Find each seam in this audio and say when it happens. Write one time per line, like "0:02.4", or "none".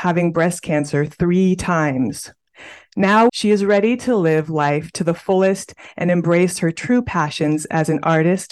0:03.3